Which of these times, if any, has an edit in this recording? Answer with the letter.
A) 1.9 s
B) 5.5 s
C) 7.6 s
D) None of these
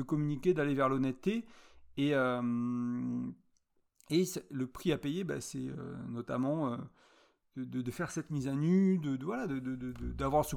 D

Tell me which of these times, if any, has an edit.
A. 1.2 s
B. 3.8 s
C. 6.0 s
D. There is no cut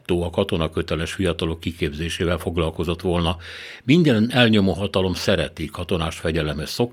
D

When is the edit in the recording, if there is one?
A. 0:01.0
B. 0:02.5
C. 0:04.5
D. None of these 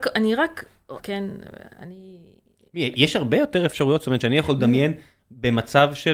A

